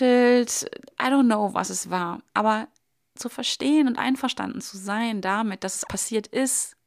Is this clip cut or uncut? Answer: cut